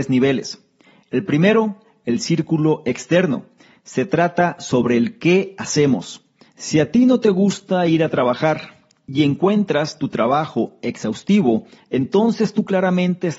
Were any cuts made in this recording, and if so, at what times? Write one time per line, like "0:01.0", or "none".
0:06.5